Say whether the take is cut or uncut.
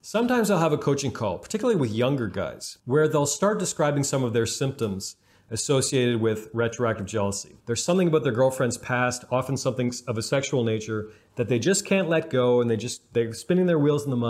cut